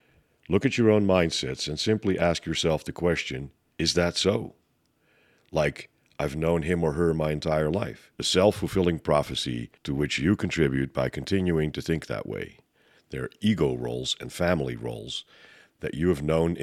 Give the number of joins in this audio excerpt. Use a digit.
2